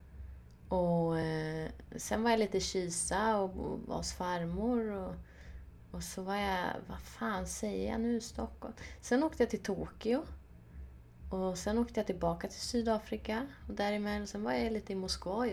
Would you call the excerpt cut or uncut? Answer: uncut